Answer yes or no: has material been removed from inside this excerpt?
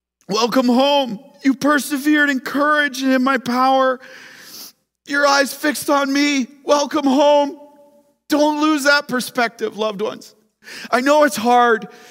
no